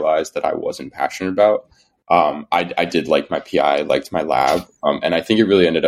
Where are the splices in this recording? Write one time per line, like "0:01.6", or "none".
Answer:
0:02.0